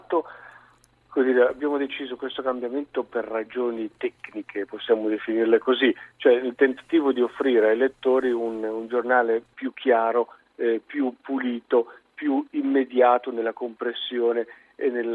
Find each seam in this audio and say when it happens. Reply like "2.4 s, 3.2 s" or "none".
none